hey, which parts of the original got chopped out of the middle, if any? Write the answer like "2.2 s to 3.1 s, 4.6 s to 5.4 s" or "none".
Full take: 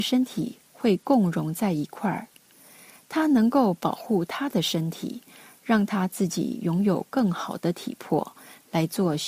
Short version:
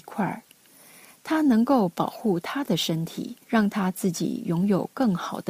5.3 s to 5.6 s